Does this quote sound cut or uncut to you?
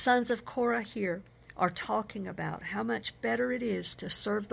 uncut